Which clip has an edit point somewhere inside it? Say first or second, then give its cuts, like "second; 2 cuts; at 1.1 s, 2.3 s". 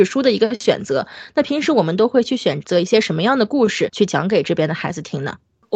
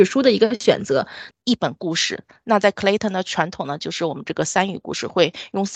second; 1 cut; at 1.3 s